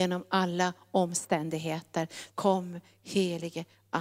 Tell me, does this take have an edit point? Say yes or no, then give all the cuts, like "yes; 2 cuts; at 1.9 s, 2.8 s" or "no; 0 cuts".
yes; 1 cut; at 2.3 s